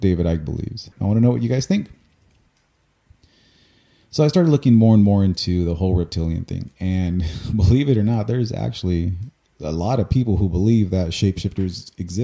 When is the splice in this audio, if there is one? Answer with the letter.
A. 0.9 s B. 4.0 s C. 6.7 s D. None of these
A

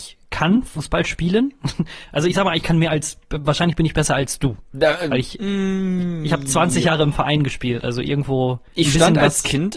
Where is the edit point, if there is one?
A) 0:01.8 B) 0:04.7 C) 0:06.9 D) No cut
D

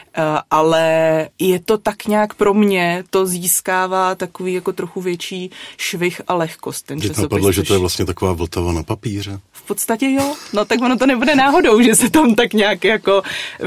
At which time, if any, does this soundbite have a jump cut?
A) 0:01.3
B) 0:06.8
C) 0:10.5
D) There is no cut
A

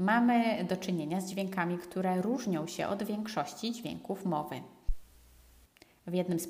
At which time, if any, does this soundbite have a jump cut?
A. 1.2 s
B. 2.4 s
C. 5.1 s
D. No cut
D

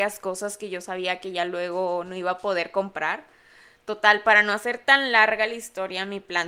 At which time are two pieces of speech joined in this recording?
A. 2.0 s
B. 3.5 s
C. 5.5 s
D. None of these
D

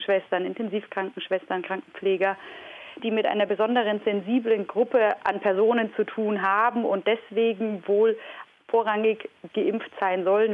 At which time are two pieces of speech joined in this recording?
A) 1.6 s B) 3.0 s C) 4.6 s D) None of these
B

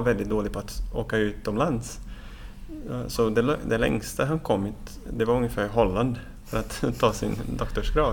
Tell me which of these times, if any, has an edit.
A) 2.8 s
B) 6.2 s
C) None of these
C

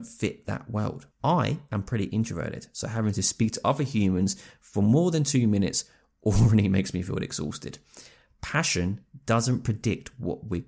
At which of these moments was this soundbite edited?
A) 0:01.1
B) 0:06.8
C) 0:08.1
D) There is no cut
D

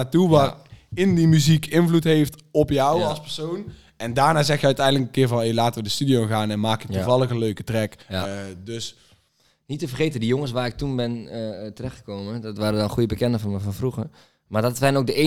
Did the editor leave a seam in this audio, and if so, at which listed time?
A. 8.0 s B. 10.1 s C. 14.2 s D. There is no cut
A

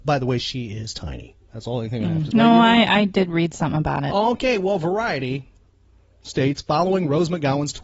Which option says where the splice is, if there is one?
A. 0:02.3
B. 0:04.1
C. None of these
A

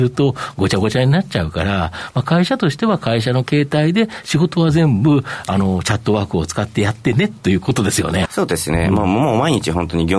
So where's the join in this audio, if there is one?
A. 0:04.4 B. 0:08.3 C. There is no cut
B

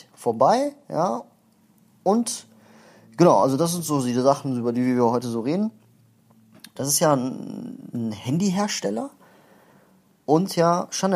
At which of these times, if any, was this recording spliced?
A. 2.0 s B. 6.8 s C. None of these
B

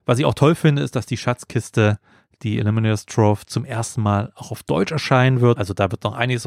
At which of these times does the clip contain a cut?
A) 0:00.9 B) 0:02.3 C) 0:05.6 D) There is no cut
C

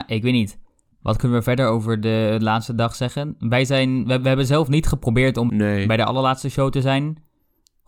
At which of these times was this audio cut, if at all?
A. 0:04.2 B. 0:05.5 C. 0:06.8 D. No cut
B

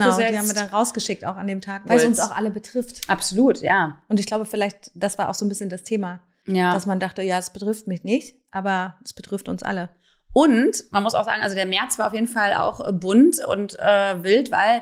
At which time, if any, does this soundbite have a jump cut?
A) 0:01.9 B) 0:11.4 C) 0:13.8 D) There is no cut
A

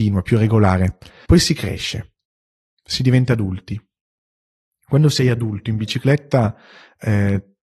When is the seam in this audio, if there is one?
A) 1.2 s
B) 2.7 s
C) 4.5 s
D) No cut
A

